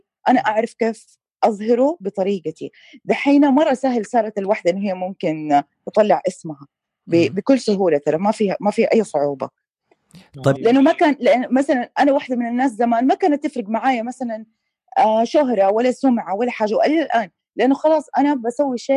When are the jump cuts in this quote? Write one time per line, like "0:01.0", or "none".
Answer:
0:10.6